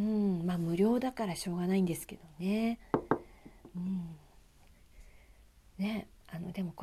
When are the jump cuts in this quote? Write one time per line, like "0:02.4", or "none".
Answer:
none